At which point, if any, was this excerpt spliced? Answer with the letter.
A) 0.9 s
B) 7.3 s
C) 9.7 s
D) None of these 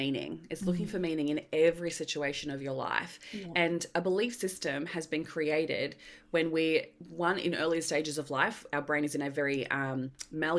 D